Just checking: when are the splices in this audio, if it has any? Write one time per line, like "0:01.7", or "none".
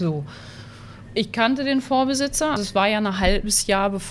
0:02.6